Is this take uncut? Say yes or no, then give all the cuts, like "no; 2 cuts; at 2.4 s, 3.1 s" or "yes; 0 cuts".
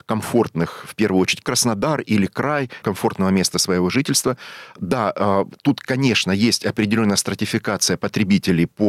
no; 2 cuts; at 1.4 s, 2.8 s